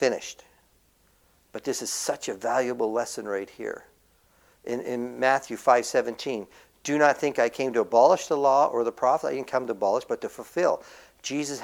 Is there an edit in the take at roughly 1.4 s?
no; 1 cut; at 4.8 s

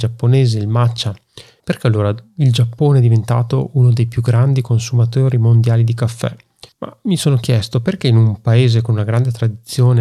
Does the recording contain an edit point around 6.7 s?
yes; 2 cuts; at 1.6 s, 6.7 s

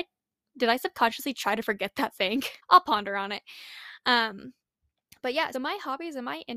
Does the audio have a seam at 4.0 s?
no; 2 cuts; at 2.6 s, 5.5 s

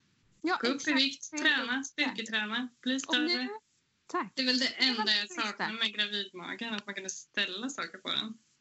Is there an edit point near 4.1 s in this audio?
yes; 1 cut; at 4.1 s

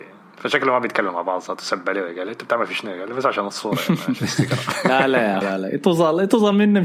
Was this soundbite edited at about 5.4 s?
yes; 1 cut; at 5.4 s

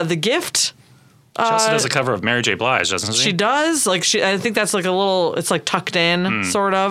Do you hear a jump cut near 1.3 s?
no; 0 cuts

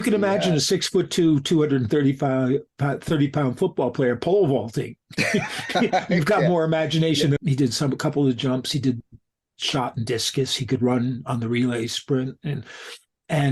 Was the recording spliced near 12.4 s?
no; 1 cut; at 7.4 s

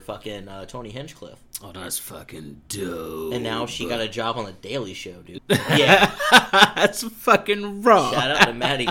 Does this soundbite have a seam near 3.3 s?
no; 1 cut; at 5.4 s

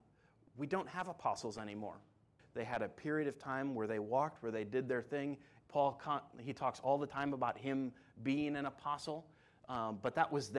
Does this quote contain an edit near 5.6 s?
yes; 2 cuts; at 2.4 s, 5.6 s

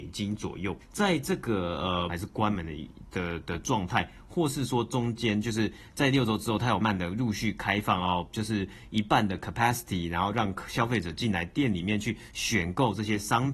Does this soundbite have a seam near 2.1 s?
yes; 2 cuts; at 2.1 s, 6.8 s

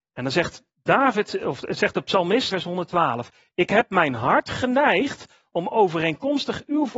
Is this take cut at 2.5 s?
yes; 1 cut; at 2.5 s

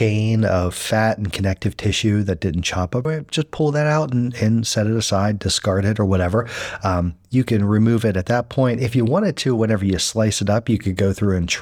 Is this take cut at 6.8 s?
no; 1 cut; at 3.0 s

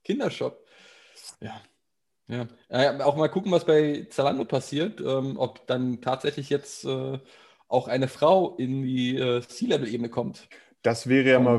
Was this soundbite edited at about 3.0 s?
no; 0 cuts

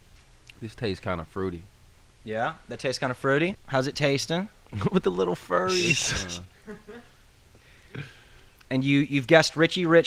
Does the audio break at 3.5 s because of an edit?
yes; 1 cut; at 3.5 s

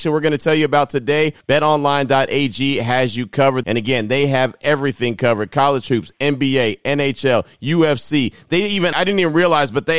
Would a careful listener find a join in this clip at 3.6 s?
yes; 3 cuts; at 1.4 s, 3.6 s, 8.9 s

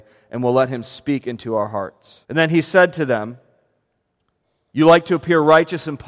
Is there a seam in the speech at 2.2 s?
yes; 1 cut; at 2.2 s

